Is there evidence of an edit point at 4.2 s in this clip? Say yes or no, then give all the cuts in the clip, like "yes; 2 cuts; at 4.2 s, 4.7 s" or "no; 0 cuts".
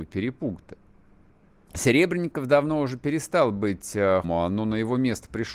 yes; 2 cuts; at 1.7 s, 4.2 s